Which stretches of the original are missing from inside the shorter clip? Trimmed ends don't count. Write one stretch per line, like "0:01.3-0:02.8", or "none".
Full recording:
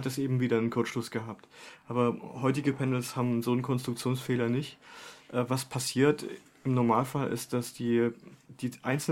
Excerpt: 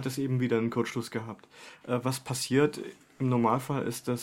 0:01.8-0:05.3